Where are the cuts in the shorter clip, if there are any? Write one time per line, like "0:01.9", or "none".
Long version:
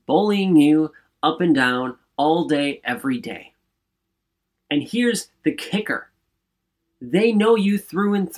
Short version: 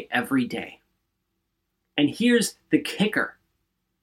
none